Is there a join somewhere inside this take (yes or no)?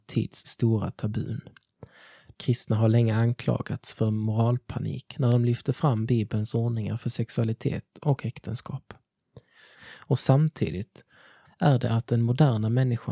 yes